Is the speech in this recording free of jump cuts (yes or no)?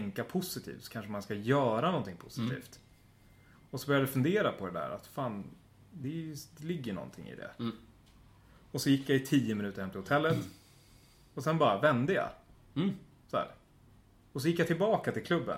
yes